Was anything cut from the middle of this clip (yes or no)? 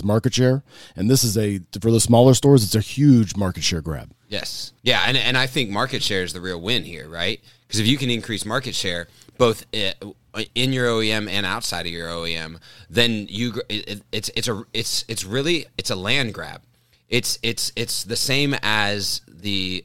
yes